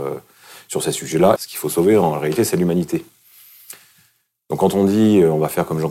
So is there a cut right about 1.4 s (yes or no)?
yes